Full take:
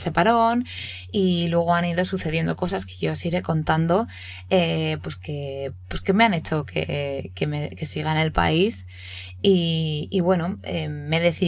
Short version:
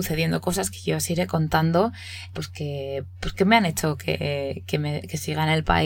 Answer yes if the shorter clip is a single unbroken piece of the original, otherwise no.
no